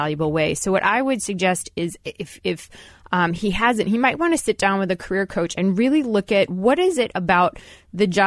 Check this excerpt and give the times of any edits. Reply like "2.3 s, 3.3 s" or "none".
none

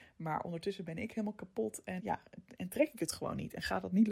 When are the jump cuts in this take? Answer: 2.0 s

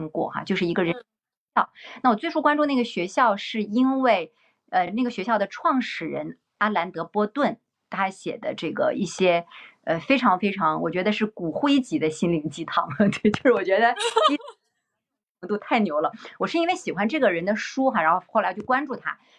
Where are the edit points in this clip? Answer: none

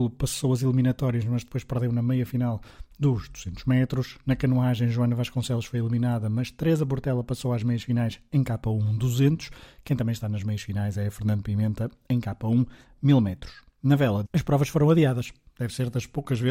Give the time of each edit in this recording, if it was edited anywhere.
14.2 s

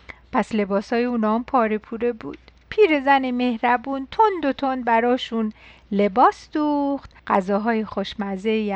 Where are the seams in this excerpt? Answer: 7.2 s

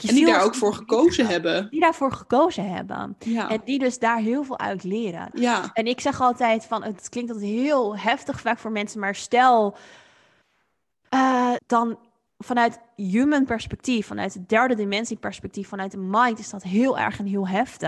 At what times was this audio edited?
5.3 s, 11.6 s

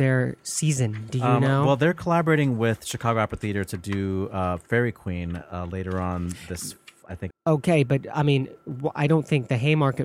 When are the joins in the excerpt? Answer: 7.3 s

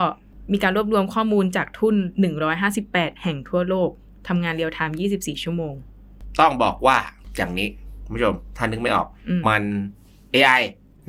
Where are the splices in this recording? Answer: 9.4 s

